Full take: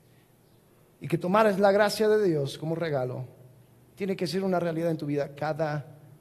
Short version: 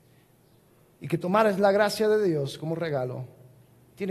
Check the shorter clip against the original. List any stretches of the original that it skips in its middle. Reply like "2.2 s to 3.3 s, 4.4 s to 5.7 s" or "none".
none